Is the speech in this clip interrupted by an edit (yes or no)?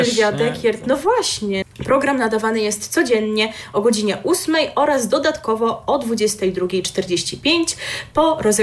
yes